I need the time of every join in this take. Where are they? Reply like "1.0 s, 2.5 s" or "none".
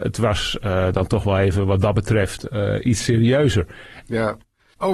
4.0 s